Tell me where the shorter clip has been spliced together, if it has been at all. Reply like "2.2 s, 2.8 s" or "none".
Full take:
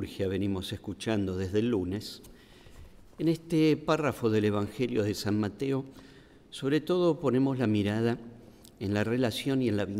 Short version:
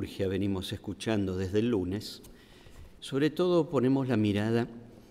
3.0 s